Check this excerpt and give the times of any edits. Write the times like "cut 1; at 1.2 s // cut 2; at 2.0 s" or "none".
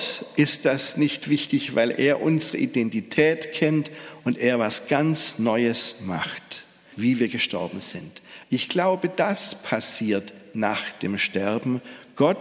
cut 1; at 6.9 s

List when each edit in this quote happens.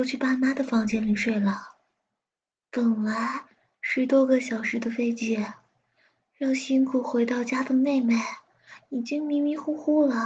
none

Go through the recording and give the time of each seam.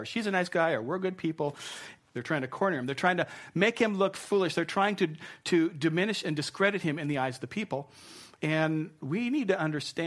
cut 1; at 2.0 s // cut 2; at 8.4 s

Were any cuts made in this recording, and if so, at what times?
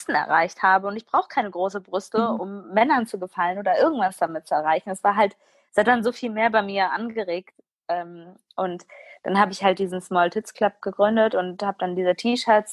none

